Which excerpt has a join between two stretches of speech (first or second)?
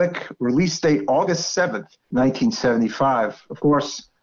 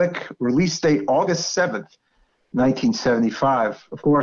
first